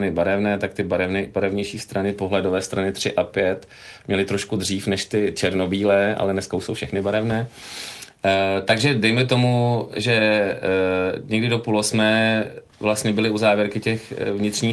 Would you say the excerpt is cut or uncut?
uncut